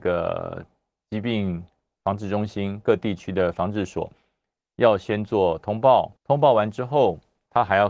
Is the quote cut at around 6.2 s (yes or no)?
yes